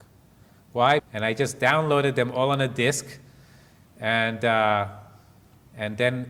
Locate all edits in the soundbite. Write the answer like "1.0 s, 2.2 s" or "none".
1.0 s